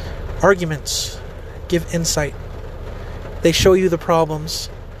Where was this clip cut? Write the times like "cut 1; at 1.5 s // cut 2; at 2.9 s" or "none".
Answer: none